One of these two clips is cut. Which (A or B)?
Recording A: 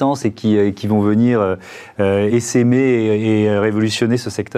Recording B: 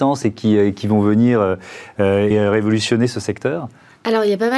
B